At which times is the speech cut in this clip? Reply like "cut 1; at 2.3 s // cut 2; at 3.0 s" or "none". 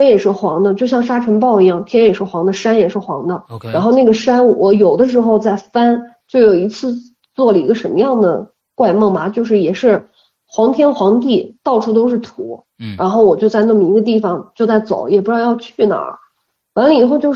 cut 1; at 6.2 s

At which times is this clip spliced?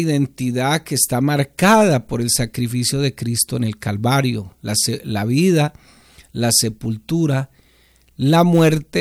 none

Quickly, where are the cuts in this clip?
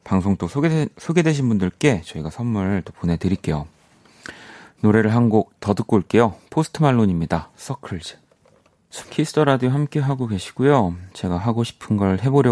cut 1; at 9.0 s // cut 2; at 11.1 s

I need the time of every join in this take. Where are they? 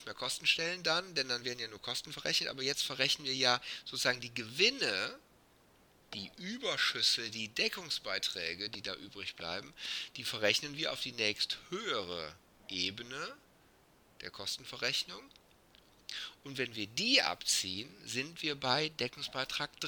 cut 1; at 16.4 s

